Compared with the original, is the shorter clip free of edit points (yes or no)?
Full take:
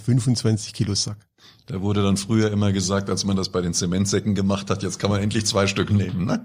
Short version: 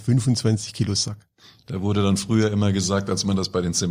yes